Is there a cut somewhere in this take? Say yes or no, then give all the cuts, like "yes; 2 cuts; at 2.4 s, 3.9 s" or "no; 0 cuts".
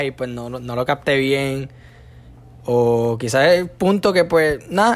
no; 0 cuts